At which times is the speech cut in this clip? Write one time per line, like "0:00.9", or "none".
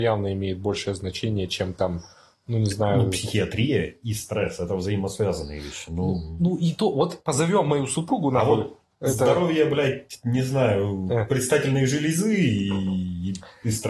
none